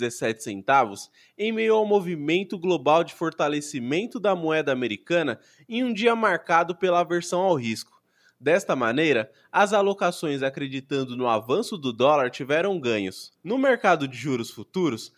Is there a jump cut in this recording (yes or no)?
no